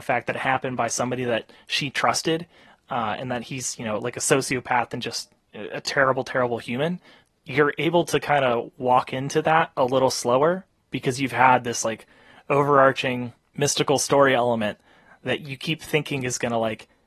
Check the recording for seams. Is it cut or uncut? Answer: uncut